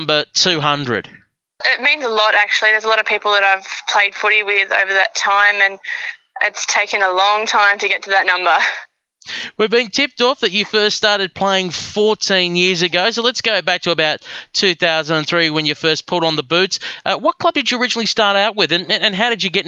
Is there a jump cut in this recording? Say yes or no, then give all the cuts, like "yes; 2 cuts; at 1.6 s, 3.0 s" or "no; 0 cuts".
no; 0 cuts